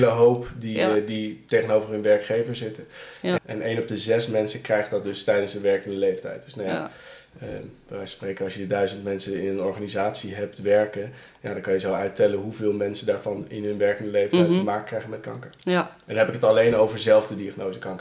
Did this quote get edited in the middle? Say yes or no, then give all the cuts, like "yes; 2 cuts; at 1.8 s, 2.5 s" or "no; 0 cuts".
yes; 1 cut; at 3.4 s